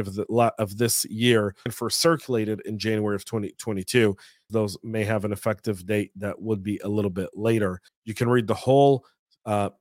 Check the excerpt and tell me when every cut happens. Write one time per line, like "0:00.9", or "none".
0:01.7
0:04.5
0:07.9

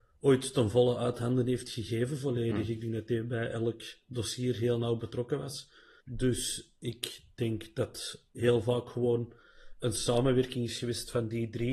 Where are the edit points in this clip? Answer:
0:06.0

